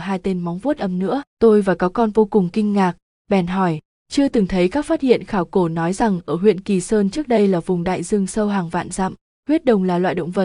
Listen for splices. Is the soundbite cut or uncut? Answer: cut